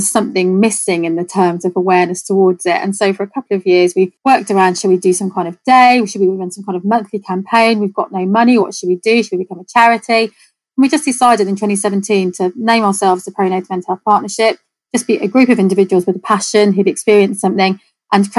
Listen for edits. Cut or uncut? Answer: uncut